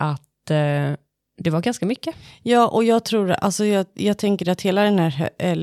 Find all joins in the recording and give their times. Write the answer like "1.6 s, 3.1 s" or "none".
none